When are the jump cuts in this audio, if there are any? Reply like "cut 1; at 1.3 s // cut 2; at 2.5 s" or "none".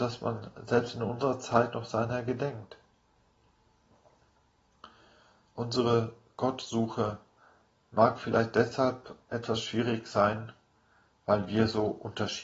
none